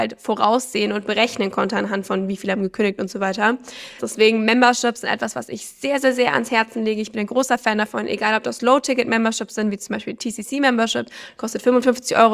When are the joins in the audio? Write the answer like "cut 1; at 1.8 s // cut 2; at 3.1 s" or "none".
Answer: cut 1; at 4.0 s